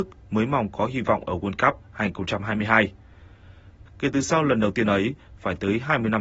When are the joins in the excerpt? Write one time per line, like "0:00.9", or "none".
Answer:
0:03.9